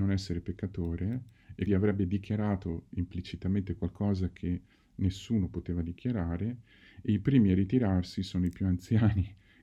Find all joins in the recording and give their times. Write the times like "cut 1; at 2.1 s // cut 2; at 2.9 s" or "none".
cut 1; at 1.7 s